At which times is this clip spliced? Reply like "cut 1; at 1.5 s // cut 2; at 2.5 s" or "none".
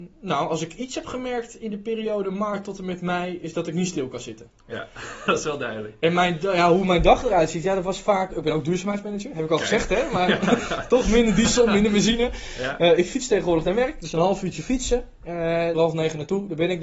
cut 1; at 5.3 s // cut 2; at 8.3 s // cut 3; at 15.7 s